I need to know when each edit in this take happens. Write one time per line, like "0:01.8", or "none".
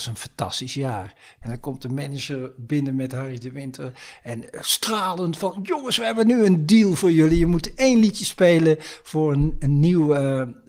0:01.4